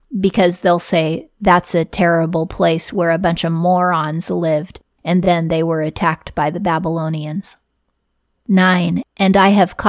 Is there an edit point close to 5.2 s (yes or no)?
no